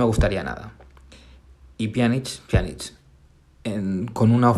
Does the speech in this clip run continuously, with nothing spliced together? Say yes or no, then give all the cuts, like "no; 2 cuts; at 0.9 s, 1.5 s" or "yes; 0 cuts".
yes; 0 cuts